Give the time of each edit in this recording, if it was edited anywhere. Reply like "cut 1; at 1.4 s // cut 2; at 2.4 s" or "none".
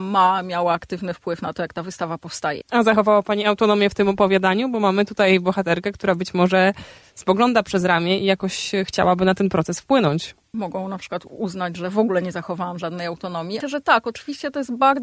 cut 1; at 2.6 s // cut 2; at 10.5 s // cut 3; at 13.6 s